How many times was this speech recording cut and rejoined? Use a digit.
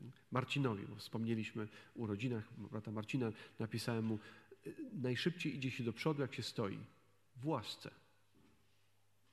0